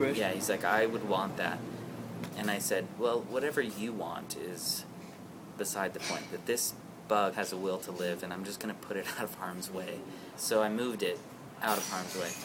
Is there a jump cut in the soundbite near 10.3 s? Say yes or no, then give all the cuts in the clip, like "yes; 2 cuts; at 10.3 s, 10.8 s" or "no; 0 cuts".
yes; 2 cuts; at 7.3 s, 10.3 s